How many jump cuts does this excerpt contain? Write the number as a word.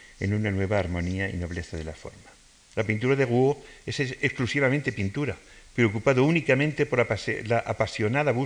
one